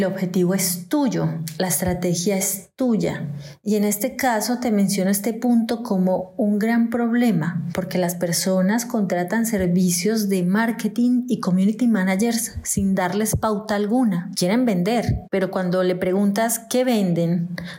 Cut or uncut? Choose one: uncut